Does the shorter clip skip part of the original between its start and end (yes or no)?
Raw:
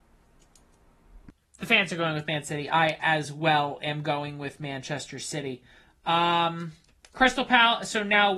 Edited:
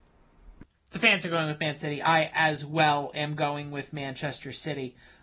no